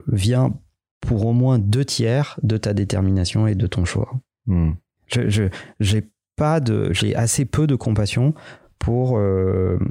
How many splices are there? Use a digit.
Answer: 0